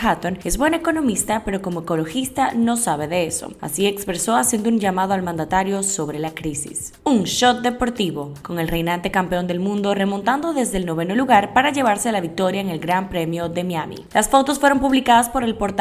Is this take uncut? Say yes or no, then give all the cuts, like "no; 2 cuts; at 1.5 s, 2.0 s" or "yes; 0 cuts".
no; 2 cuts; at 8.4 s, 14.1 s